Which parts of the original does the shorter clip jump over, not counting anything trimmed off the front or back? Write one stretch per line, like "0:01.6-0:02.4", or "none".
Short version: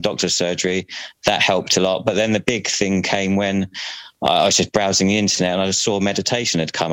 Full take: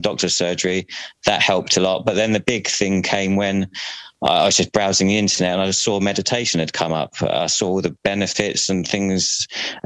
none